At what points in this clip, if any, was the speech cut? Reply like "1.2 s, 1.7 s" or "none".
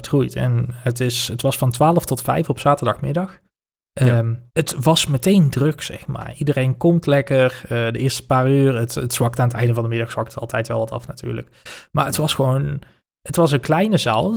4.5 s